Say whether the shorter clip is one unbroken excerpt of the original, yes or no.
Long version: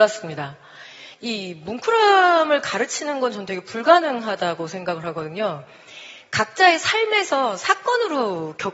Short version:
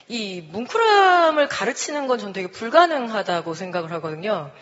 yes